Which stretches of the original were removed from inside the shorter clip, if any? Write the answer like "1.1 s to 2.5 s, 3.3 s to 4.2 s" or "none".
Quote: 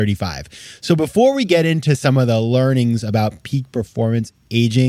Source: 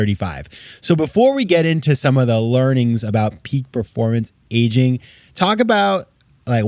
none

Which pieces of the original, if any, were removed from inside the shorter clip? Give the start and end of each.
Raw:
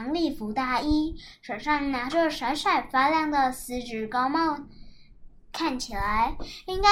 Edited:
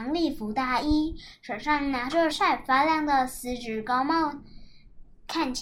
2.3 s to 2.6 s

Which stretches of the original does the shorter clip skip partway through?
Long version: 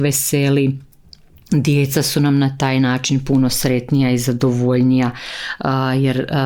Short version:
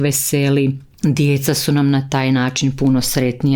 0.9 s to 1.4 s

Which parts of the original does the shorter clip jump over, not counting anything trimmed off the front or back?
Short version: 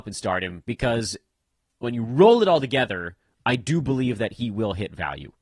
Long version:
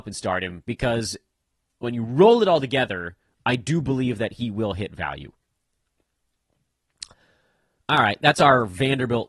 none

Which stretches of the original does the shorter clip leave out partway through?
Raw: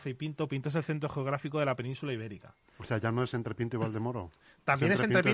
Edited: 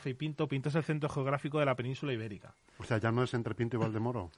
none

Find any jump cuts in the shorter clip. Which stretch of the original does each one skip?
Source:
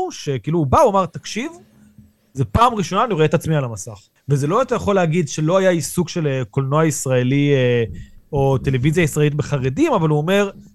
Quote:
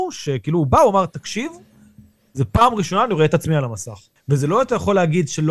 none

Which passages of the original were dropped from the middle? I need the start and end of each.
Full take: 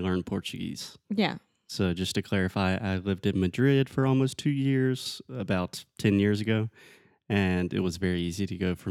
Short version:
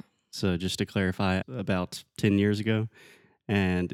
2.8 s to 5.2 s

